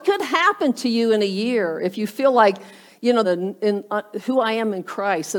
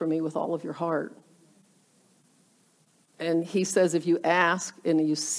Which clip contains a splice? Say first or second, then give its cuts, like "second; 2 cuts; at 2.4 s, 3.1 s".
first; 1 cut; at 3.2 s